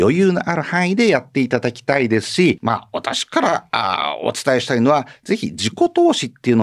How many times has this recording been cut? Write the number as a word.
one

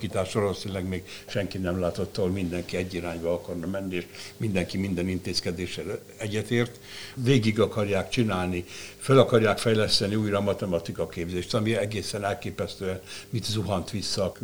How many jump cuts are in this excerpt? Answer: one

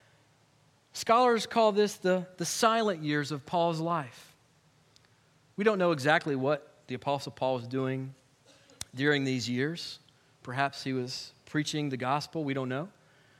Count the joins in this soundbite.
zero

